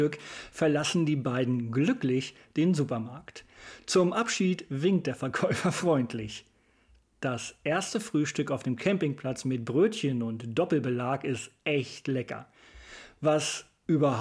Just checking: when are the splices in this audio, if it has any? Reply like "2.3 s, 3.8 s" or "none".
none